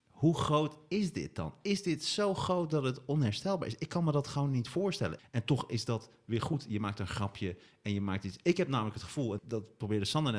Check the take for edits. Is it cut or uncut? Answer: cut